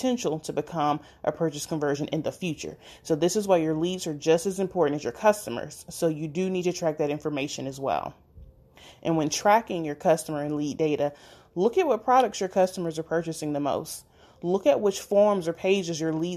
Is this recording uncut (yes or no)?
yes